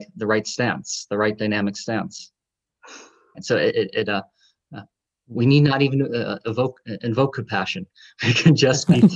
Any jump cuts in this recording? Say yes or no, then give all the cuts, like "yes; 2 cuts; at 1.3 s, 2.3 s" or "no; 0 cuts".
yes; 1 cut; at 3.3 s